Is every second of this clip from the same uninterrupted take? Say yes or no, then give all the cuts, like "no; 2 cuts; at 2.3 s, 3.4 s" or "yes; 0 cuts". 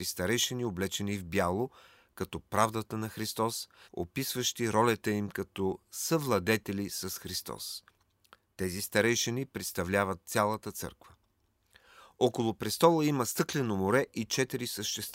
no; 1 cut; at 3.9 s